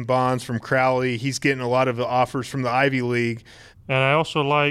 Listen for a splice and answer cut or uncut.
cut